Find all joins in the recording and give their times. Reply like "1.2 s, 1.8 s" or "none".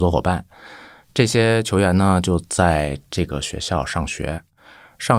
none